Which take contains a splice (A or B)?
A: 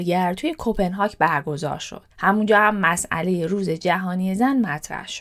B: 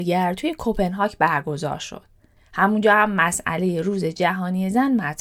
A